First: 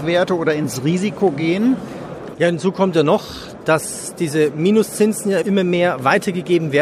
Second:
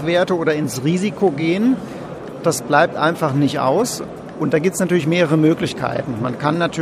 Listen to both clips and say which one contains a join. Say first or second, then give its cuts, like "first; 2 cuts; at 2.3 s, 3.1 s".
first; 1 cut; at 2.3 s